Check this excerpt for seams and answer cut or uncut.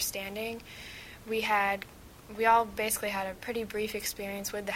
uncut